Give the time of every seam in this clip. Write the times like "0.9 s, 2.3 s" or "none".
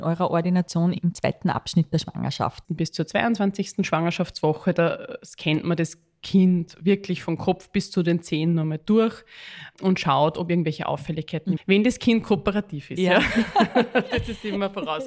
2.6 s, 11.6 s